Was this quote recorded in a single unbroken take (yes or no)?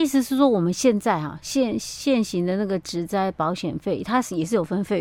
yes